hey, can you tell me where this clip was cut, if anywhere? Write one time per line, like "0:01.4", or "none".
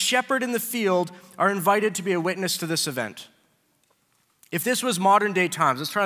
none